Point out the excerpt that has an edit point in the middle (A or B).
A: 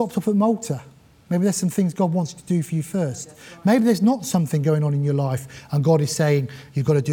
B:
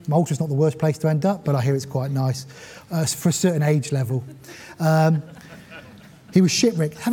B